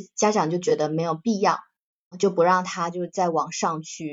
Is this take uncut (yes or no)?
no